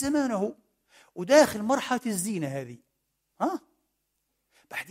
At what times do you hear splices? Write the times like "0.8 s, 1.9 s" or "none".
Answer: none